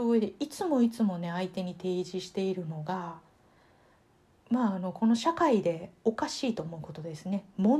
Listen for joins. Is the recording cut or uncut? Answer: uncut